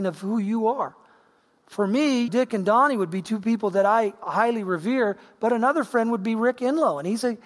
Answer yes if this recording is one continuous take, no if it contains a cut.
no